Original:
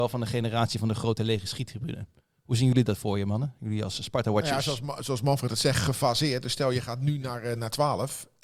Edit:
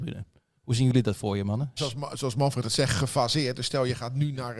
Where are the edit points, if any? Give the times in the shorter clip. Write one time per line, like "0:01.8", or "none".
0:01.8